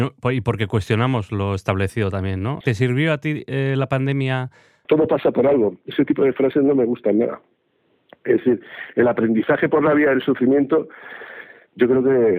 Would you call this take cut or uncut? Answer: cut